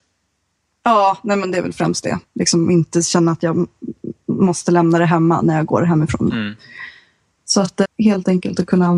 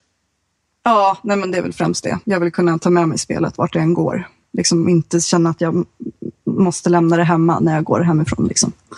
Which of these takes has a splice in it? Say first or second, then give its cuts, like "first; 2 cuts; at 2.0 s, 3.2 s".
first; 3 cuts; at 2.2 s, 6.3 s, 7.8 s